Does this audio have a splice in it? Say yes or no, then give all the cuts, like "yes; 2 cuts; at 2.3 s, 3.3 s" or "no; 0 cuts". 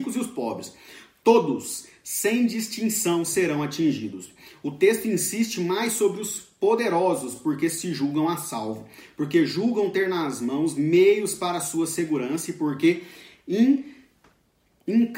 no; 0 cuts